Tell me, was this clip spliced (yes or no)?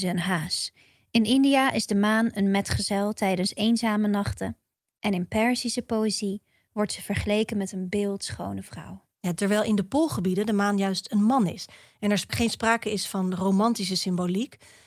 no